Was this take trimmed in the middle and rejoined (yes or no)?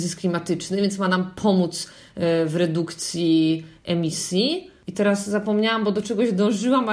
no